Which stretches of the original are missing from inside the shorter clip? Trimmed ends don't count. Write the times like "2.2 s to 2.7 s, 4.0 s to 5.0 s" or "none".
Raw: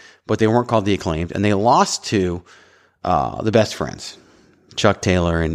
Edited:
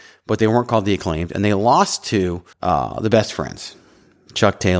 2.5 s to 2.9 s

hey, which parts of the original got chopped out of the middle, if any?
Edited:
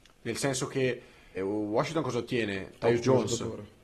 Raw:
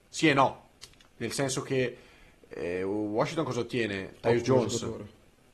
2.3 s to 2.8 s

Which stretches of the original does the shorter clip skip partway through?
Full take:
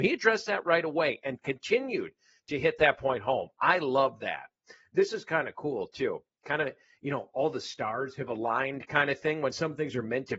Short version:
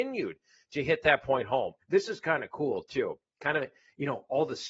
3.6 s to 4.8 s

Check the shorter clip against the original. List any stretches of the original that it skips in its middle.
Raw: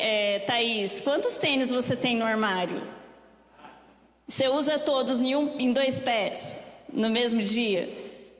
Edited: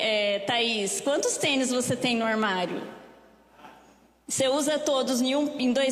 none

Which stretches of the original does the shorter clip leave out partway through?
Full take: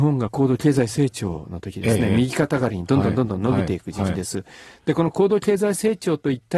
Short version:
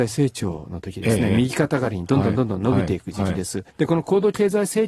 4.5 s to 4.8 s

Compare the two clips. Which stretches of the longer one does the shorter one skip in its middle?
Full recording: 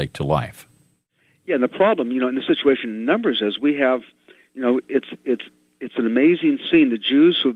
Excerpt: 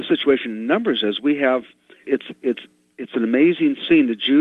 4.4 s to 4.8 s

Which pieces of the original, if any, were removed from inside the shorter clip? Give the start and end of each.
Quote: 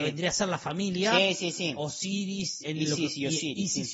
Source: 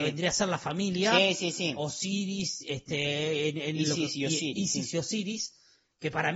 2.6 s to 3.6 s

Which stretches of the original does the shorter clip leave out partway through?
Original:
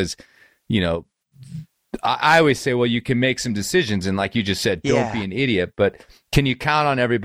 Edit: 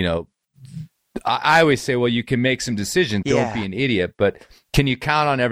4.0 s to 4.8 s

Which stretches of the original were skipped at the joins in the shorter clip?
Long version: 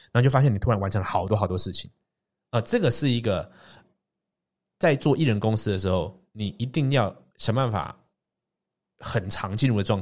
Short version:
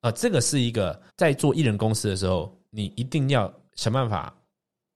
3.6 s to 4.7 s

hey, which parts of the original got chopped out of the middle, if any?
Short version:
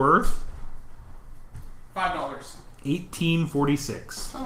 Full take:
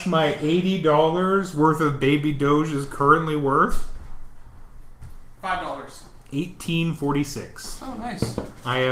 none

